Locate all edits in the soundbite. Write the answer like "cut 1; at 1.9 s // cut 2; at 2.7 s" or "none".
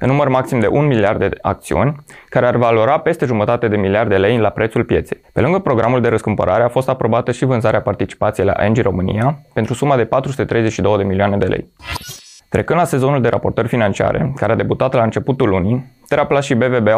none